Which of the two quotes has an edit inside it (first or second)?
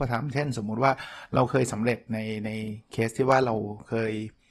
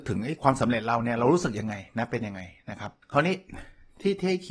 second